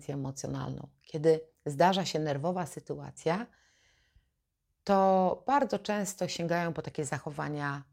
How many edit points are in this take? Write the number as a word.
zero